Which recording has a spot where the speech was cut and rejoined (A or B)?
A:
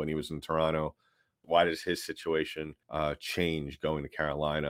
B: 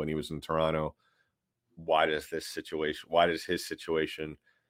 A